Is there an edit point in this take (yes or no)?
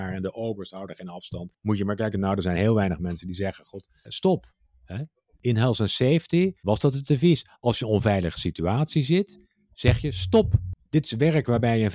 yes